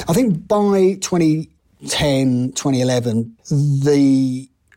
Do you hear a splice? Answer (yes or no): yes